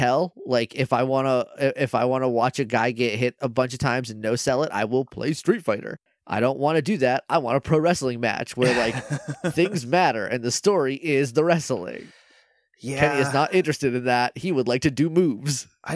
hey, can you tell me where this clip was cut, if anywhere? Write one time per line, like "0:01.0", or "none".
none